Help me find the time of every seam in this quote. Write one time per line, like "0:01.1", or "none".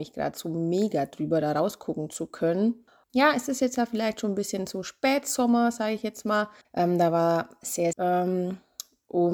0:03.0
0:06.6
0:07.9